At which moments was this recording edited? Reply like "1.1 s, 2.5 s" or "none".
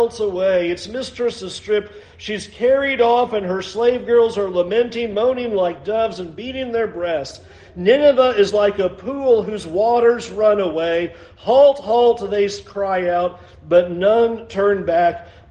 none